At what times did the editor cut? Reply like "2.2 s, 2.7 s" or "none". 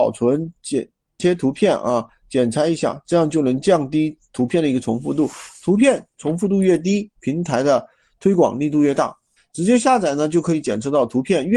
1.2 s, 9.4 s